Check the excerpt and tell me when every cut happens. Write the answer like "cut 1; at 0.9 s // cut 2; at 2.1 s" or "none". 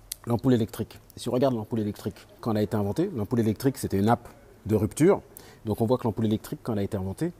cut 1; at 2.4 s

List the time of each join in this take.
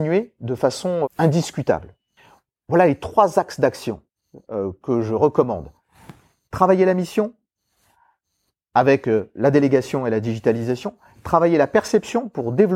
cut 1; at 1.0 s

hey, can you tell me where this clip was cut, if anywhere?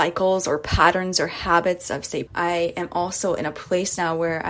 cut 1; at 2.3 s

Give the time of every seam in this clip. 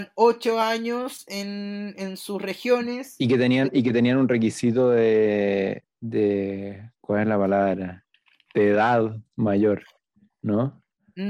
none

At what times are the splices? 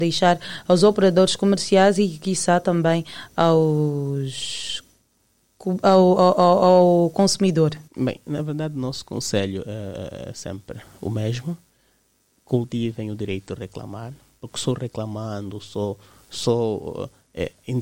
cut 1; at 6.1 s // cut 2; at 7.9 s

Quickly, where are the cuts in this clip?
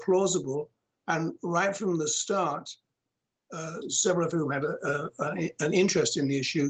cut 1; at 3.8 s

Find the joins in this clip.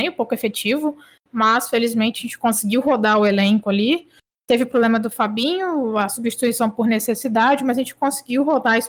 none

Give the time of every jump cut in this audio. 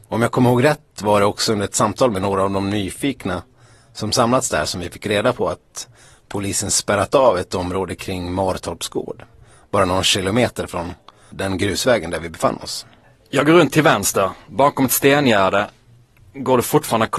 none

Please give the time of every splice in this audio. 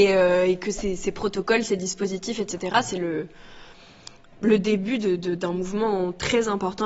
none

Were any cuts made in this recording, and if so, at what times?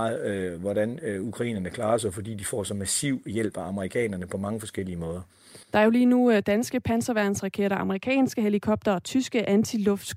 cut 1; at 5.6 s

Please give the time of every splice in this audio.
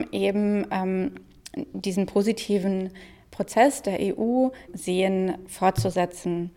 cut 1; at 4.7 s

